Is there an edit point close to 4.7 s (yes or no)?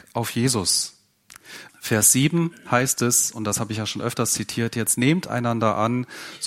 no